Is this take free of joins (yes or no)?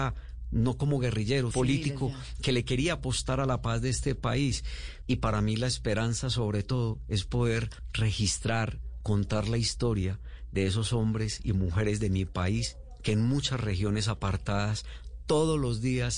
no